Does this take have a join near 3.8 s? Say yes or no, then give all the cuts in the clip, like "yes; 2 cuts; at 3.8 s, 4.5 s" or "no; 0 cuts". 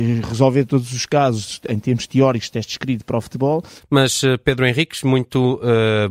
yes; 1 cut; at 3.8 s